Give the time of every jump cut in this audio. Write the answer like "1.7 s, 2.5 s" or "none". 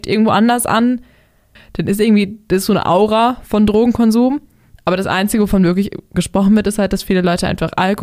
1.6 s